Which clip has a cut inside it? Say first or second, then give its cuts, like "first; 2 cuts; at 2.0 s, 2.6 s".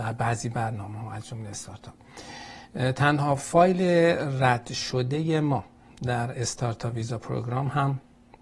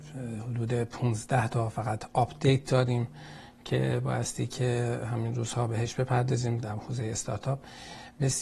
second; 1 cut; at 6.6 s